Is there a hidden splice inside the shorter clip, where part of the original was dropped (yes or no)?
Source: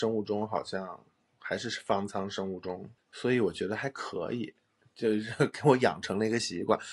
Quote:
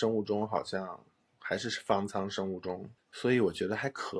no